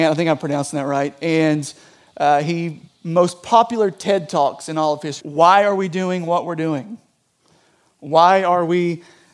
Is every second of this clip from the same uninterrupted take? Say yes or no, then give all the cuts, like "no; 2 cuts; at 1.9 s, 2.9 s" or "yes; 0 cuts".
no; 2 cuts; at 2.9 s, 5.2 s